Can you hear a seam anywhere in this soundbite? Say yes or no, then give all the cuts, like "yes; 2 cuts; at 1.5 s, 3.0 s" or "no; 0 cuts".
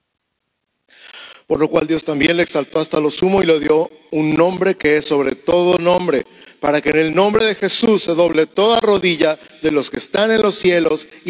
no; 0 cuts